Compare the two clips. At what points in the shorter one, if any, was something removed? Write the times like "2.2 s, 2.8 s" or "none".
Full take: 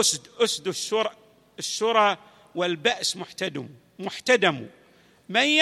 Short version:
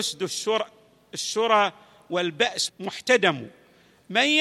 2.7 s